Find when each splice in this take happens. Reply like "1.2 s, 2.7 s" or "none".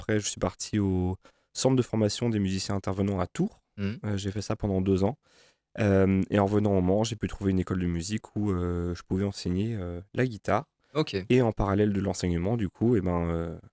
none